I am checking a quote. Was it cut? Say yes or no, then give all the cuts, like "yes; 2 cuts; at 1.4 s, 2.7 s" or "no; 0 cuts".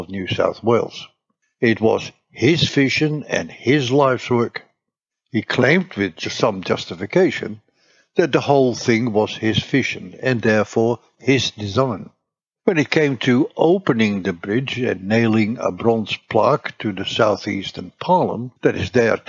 no; 0 cuts